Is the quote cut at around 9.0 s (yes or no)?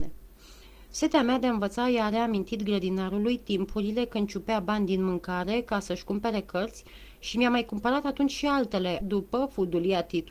yes